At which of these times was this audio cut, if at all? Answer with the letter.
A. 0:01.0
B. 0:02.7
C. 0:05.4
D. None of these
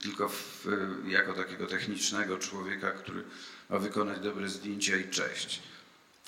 D